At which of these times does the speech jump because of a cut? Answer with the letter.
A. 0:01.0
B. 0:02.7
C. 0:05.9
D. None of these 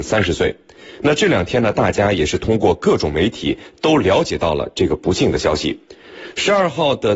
D